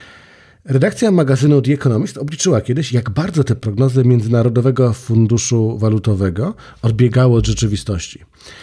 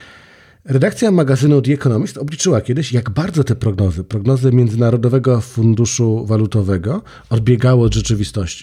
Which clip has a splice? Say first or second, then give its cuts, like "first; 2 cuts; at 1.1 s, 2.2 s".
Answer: first; 1 cut; at 3.6 s